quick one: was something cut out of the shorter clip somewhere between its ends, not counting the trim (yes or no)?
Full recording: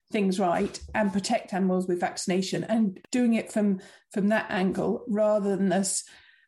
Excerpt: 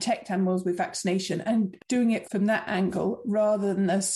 yes